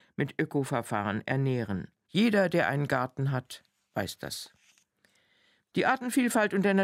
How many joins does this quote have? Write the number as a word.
one